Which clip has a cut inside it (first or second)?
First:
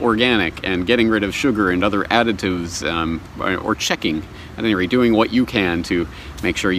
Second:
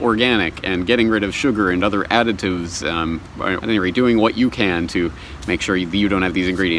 second